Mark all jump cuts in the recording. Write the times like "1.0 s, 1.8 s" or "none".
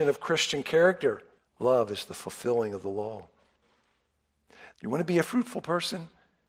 1.4 s, 4.7 s